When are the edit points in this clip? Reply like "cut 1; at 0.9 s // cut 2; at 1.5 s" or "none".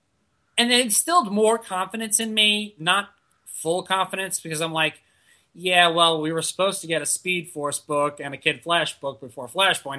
none